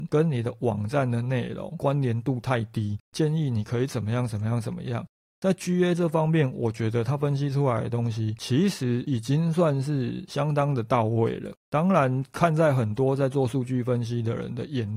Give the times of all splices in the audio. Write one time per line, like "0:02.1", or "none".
none